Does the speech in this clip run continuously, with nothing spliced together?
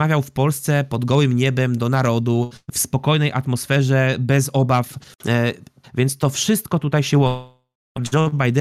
no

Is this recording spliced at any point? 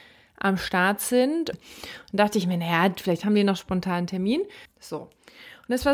yes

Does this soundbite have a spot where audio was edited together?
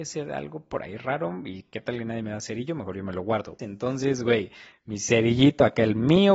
yes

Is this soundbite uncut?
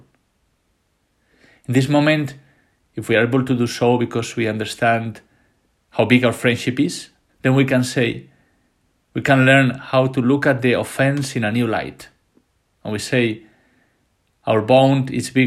no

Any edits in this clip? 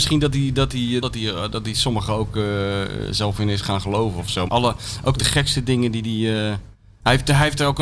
yes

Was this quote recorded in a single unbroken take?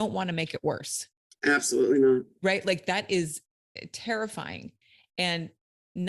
yes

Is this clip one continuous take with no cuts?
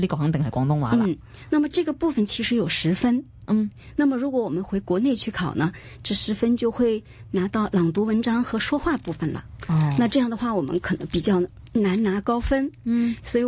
yes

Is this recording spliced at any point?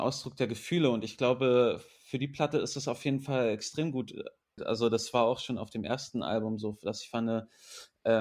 yes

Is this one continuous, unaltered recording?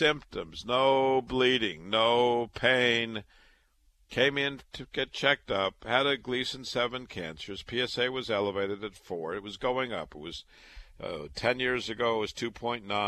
yes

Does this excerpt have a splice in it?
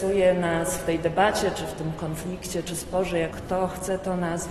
yes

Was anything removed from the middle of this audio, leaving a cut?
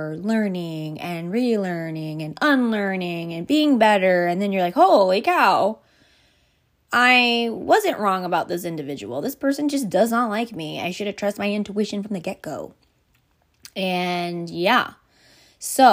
no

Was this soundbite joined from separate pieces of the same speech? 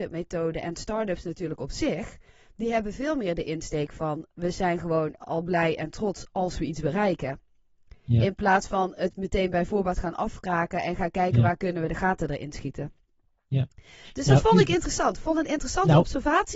no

